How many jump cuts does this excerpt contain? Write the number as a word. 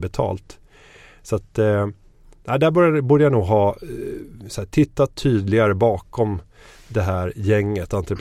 zero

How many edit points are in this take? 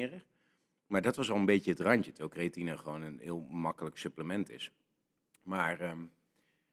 zero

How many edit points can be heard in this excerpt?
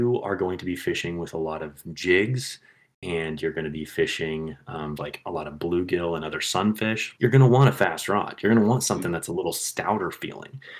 two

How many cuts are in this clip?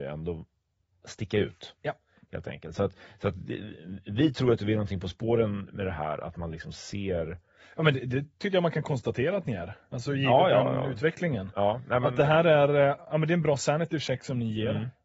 zero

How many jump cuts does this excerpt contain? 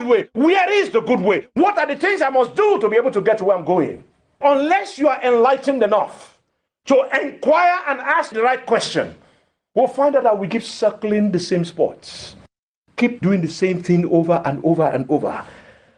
one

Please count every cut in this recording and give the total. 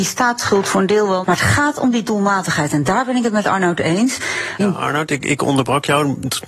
two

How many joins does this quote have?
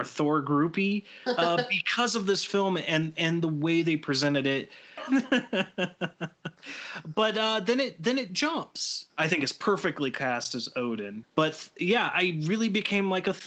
three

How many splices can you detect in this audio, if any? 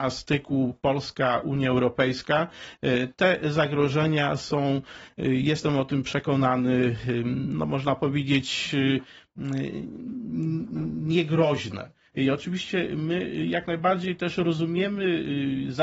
one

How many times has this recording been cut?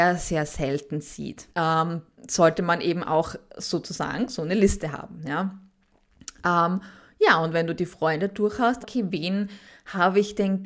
two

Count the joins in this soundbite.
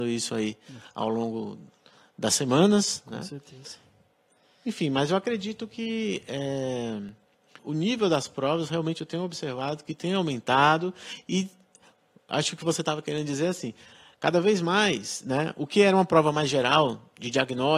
one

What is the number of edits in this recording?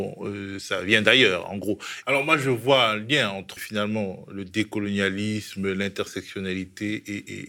two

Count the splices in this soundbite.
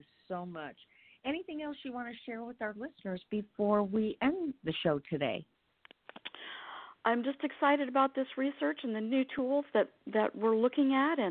zero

